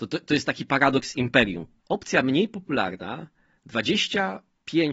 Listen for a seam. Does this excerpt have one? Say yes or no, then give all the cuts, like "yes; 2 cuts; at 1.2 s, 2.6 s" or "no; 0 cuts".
yes; 1 cut; at 1.8 s